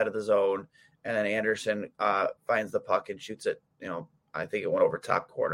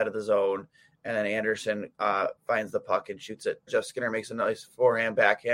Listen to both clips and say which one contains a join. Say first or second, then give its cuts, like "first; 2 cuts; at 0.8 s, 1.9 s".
second; 1 cut; at 3.7 s